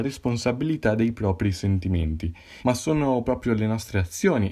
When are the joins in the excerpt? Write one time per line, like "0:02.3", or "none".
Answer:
0:02.6